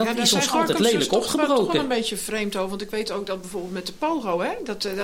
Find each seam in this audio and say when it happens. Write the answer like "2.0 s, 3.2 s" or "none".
none